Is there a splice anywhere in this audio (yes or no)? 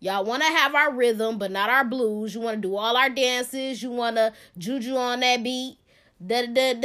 no